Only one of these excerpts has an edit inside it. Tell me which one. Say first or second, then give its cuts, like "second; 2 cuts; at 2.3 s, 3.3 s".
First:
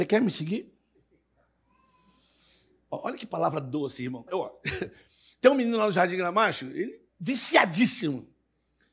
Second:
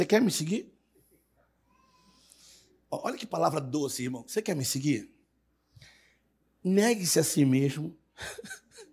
first; 2 cuts; at 4.3 s, 7.1 s